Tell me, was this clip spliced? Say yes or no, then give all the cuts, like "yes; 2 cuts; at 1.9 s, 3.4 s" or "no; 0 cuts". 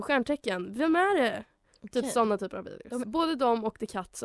yes; 1 cut; at 3.0 s